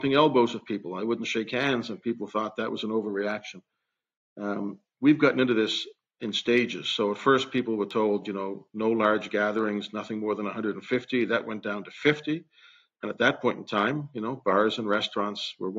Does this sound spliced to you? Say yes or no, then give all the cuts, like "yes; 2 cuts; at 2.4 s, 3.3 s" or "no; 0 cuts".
no; 0 cuts